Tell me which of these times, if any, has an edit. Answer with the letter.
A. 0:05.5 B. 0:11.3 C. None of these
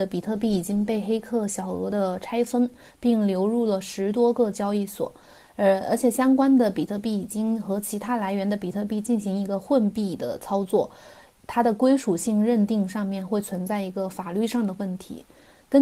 C